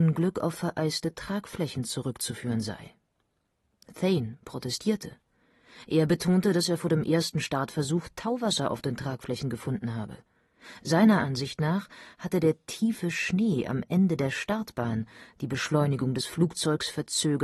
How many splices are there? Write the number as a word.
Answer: zero